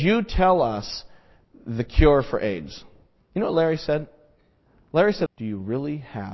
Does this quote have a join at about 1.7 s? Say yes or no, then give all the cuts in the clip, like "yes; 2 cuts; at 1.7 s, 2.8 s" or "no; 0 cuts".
no; 2 cuts; at 3.2 s, 5.3 s